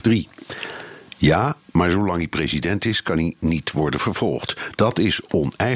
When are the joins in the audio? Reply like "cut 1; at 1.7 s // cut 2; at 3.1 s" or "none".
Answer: cut 1; at 1.1 s // cut 2; at 4.8 s